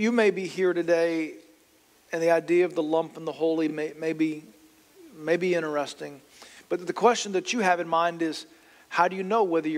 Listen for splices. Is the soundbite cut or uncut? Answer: uncut